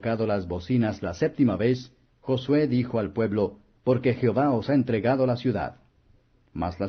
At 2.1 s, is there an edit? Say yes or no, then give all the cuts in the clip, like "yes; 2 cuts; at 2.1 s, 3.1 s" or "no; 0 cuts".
no; 1 cut; at 3.8 s